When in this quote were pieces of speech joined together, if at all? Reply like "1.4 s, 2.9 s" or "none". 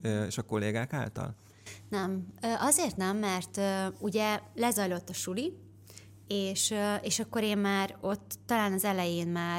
none